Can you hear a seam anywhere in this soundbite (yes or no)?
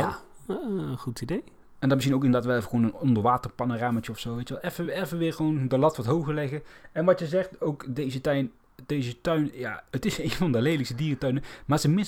no